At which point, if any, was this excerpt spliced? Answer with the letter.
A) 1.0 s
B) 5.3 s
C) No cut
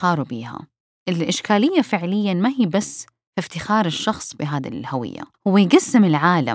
B